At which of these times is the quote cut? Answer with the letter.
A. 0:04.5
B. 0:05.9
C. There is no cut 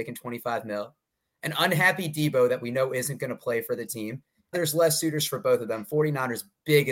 A